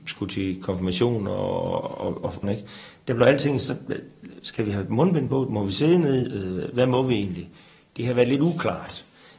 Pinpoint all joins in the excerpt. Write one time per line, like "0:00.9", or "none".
0:02.4